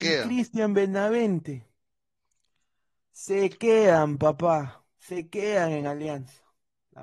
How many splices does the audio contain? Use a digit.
0